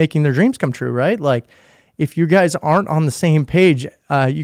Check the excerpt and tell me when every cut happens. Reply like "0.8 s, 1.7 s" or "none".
none